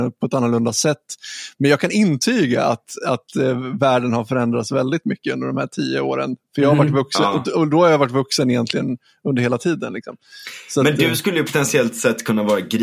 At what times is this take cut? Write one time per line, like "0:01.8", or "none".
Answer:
none